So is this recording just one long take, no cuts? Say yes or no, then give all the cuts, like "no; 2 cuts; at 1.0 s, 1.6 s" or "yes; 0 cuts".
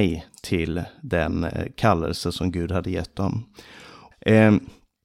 no; 1 cut; at 4.1 s